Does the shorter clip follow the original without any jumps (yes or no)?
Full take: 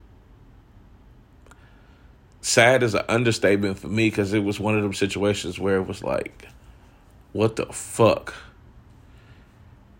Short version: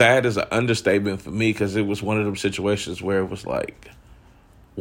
yes